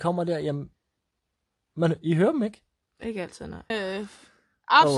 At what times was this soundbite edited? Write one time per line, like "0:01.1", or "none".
0:03.7